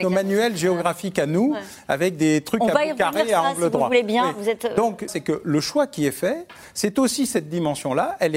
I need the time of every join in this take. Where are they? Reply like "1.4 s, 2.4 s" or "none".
5.1 s

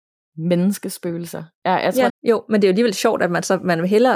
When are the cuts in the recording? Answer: 2.1 s

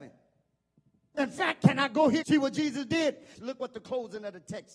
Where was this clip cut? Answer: 1.1 s, 2.2 s, 3.4 s

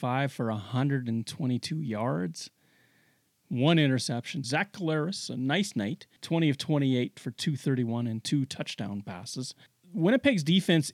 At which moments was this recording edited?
4.4 s, 6.2 s

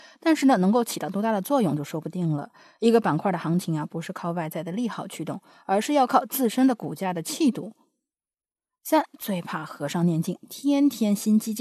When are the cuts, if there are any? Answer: none

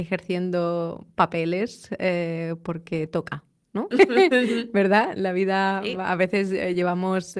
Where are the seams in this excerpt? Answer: 3.9 s

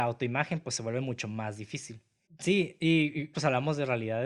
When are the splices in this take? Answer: 2.3 s, 3.3 s

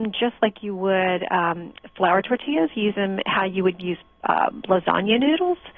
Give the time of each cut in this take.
none

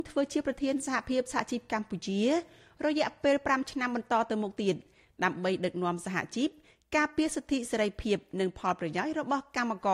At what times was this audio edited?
none

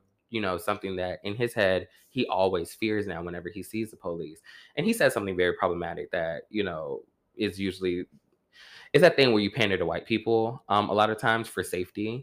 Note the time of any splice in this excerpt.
none

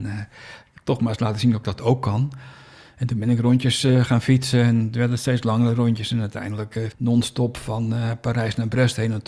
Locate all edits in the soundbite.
6.9 s

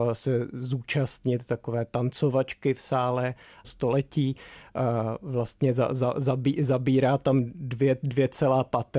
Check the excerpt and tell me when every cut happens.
3.6 s

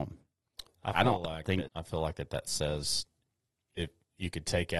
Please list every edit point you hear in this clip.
1.7 s

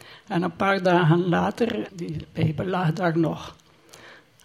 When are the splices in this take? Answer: 1.9 s

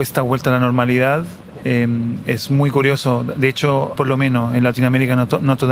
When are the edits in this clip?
1.6 s, 4.0 s

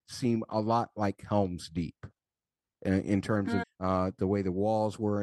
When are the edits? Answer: 3.6 s

